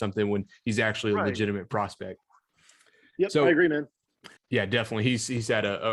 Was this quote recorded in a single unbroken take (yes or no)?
no